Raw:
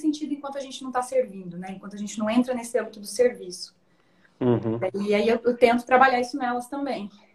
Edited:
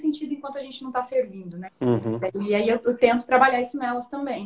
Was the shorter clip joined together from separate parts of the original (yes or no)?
yes